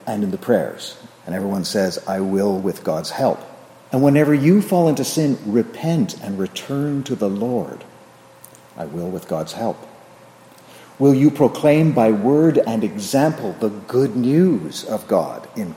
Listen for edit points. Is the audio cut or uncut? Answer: cut